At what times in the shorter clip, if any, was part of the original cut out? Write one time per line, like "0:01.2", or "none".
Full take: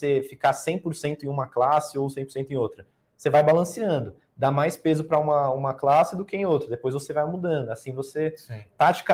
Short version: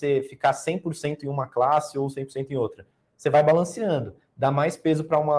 none